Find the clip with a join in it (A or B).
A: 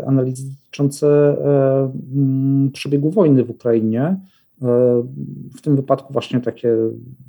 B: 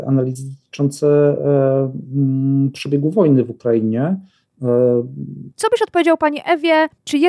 B